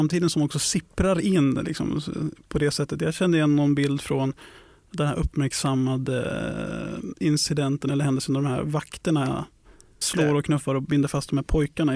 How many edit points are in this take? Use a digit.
1